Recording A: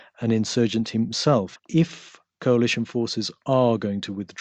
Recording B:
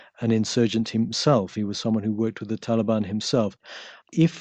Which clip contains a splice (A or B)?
A